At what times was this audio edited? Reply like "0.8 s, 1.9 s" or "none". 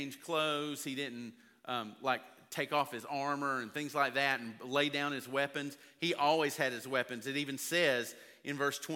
none